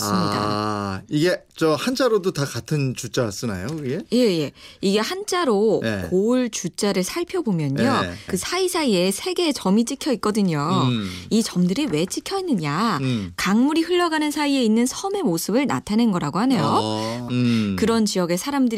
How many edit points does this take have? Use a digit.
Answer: 2